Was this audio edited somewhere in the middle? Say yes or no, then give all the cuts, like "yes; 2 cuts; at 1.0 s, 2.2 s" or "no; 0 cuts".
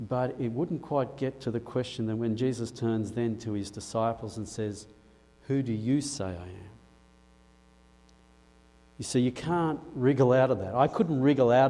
no; 0 cuts